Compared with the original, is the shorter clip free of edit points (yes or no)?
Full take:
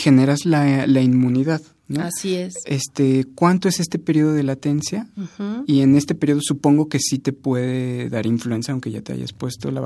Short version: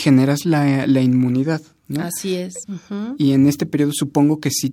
no